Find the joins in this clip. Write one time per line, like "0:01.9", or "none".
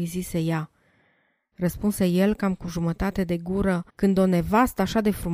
0:01.5
0:03.9